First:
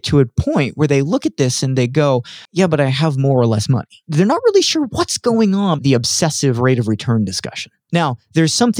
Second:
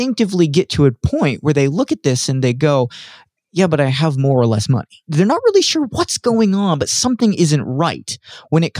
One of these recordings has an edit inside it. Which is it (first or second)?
first